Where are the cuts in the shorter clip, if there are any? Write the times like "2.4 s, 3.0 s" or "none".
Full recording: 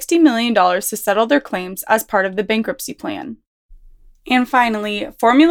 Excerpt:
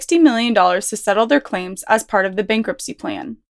none